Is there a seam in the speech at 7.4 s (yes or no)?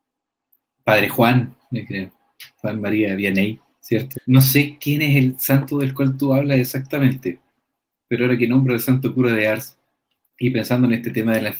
no